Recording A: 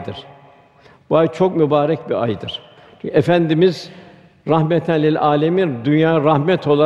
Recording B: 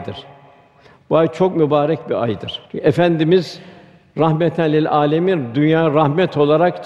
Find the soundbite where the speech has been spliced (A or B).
B